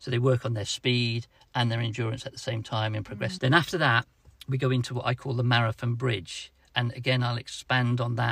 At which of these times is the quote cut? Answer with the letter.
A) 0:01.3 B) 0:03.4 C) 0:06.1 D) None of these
B